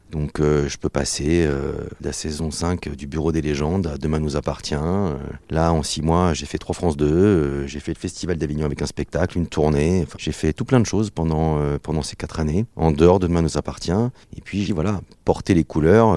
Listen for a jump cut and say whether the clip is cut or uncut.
cut